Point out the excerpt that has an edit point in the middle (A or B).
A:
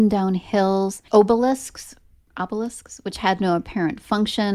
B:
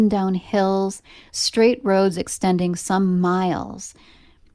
A